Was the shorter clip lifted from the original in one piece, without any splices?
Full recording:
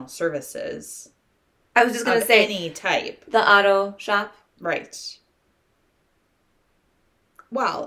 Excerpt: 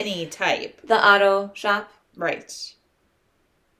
yes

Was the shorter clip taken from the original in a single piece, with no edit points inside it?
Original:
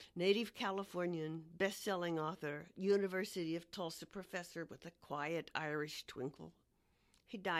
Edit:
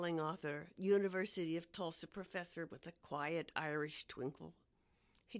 yes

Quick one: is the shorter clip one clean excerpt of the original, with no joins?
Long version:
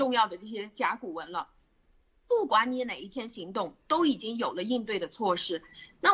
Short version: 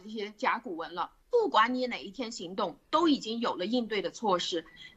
no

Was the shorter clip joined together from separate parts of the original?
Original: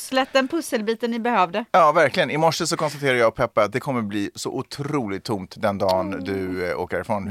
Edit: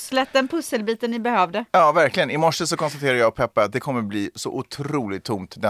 no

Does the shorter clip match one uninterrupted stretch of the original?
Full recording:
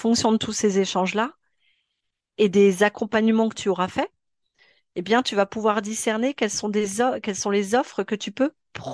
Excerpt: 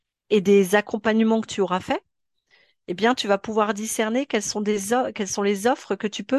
yes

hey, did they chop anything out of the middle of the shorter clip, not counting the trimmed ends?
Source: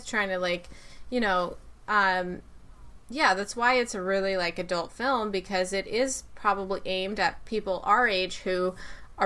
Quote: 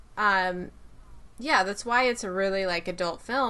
no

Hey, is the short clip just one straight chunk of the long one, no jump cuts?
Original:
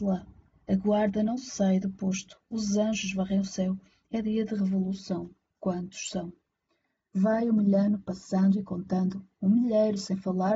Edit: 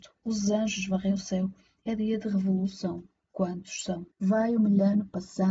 no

